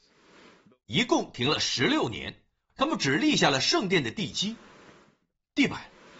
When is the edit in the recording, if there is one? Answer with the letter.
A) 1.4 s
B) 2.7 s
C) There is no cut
B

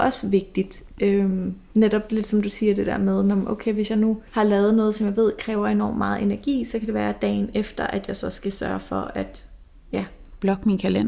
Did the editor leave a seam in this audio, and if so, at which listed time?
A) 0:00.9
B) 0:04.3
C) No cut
B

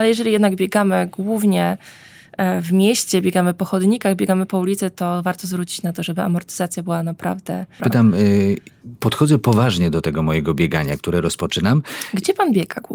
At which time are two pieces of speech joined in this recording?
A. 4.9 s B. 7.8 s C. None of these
B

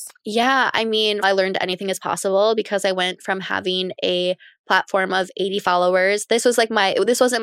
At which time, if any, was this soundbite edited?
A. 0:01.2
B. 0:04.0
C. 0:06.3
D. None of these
A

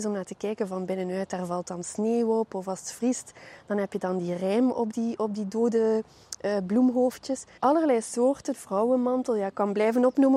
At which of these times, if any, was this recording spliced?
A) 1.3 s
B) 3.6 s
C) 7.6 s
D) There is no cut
C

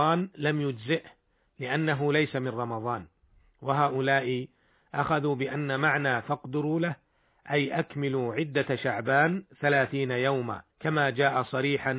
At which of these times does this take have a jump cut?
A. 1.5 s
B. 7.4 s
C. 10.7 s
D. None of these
C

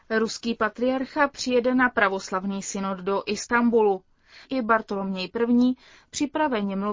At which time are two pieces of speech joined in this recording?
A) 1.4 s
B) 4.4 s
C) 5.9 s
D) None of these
B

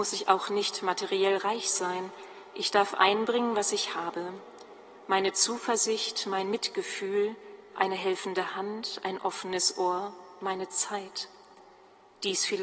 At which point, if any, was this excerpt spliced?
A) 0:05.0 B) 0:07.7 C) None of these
C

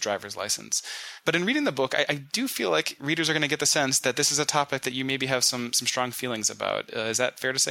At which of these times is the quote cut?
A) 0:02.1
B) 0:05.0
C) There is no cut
A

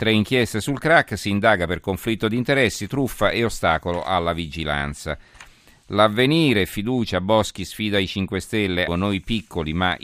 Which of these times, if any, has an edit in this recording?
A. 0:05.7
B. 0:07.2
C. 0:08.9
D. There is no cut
C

